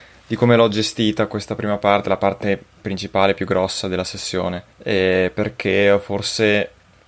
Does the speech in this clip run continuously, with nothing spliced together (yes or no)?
no